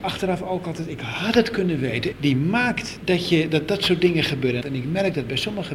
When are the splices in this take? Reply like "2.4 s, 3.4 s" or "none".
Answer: 2.1 s, 4.6 s